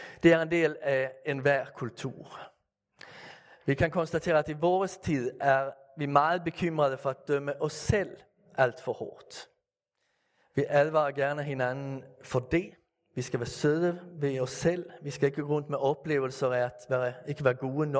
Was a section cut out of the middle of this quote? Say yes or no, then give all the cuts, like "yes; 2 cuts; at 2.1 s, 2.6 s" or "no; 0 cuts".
no; 0 cuts